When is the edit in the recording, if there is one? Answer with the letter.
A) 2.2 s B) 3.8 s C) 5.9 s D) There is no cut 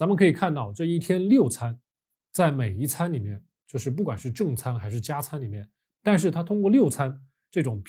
C